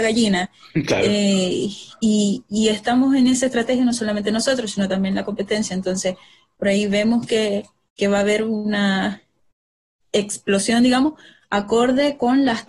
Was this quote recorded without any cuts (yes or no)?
yes